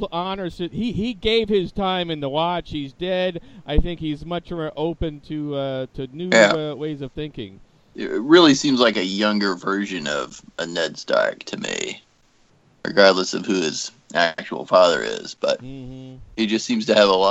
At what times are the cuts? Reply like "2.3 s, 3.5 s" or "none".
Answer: 7.9 s